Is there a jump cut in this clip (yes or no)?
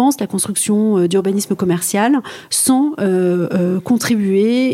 no